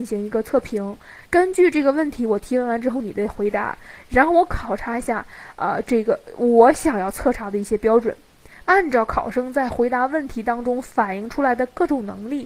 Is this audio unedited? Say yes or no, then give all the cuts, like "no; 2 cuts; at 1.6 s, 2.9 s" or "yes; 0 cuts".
no; 2 cuts; at 1.2 s, 8.6 s